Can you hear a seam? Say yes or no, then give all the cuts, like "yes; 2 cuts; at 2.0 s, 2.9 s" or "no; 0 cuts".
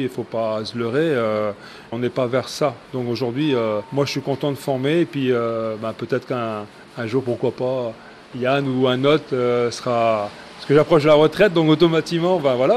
no; 0 cuts